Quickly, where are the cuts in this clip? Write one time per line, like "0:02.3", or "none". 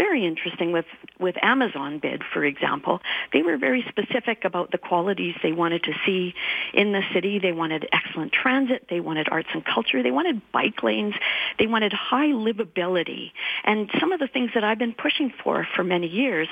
none